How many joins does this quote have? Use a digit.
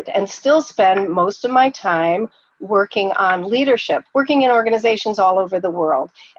1